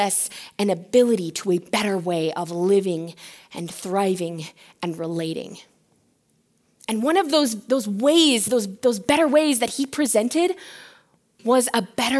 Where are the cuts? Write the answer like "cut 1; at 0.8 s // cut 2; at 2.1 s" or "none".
none

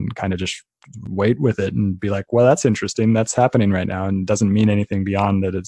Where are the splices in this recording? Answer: none

